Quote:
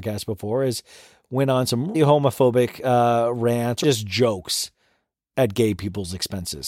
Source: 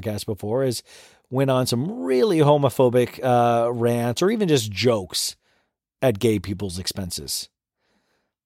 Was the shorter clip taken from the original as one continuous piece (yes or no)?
no